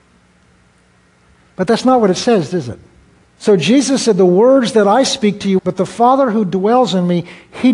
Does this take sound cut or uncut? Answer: cut